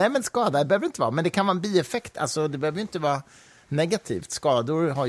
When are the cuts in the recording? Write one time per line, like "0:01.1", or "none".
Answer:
none